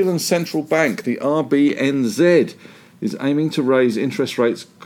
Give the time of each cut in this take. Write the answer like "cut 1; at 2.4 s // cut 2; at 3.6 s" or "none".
none